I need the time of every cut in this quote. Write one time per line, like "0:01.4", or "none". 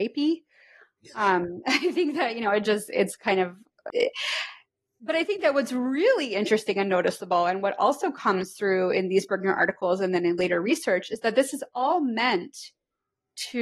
0:03.9